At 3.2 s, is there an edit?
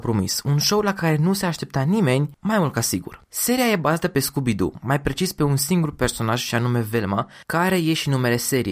no; 0 cuts

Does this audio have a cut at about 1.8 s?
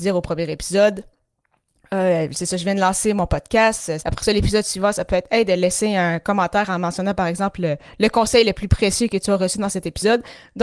no; 1 cut; at 4.0 s

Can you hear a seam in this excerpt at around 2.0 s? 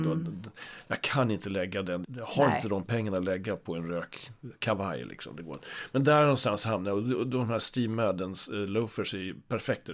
yes; 1 cut; at 2.0 s

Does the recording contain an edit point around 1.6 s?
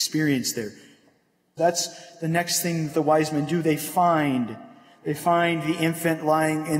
yes; 1 cut; at 1.6 s

